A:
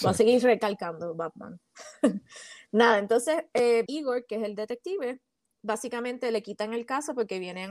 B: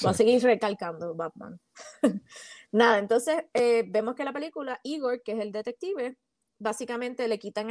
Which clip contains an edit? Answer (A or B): A